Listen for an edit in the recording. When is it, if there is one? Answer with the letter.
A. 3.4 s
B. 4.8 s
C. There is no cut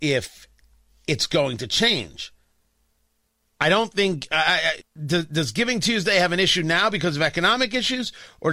B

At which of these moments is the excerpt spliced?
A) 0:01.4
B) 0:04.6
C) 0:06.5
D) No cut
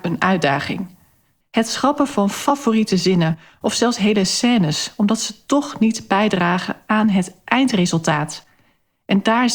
A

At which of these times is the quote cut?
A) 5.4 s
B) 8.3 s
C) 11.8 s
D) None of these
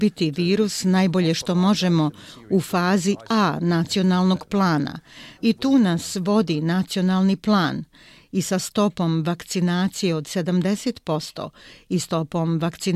A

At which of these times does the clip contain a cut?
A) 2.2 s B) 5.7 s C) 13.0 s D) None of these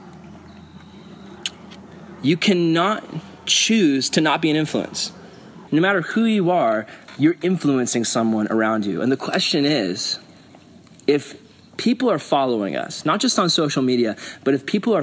B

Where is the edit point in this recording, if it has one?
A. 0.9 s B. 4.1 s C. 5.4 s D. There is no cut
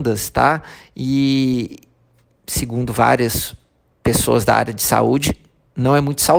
D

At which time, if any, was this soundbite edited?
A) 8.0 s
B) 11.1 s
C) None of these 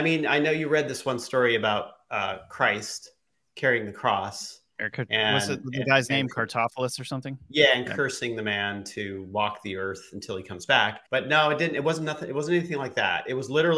B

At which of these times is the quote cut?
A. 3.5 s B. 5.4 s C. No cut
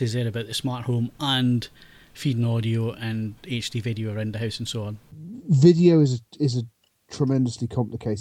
C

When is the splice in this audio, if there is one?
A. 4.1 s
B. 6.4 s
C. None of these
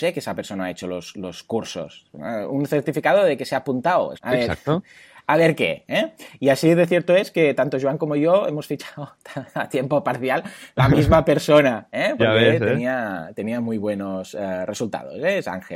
A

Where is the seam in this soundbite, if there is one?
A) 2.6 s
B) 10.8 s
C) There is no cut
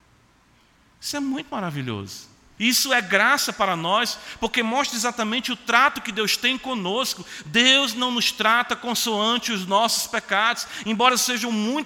A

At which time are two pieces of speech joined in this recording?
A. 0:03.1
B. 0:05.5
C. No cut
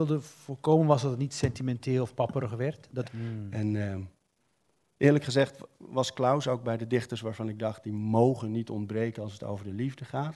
A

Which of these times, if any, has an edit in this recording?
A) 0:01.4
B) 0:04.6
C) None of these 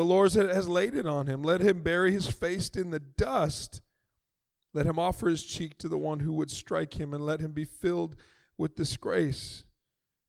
B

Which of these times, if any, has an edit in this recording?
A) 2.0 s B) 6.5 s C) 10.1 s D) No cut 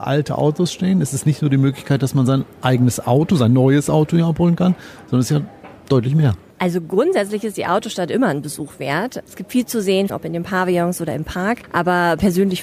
C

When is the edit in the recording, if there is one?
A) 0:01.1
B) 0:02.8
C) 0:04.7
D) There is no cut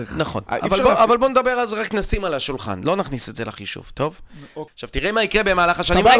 C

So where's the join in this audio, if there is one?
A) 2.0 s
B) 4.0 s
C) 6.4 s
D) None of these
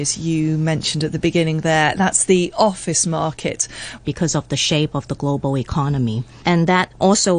B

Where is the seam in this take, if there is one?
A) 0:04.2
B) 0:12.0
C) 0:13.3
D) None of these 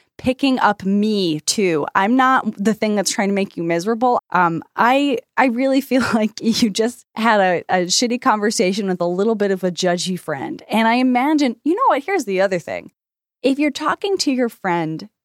A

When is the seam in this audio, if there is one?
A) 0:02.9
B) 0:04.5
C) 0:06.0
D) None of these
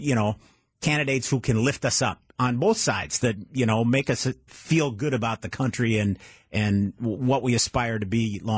B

